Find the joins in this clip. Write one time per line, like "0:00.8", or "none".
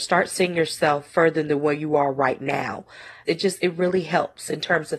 0:03.3